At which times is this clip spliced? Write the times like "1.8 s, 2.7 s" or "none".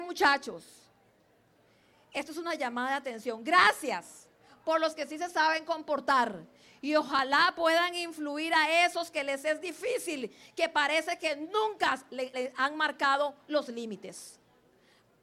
12.3 s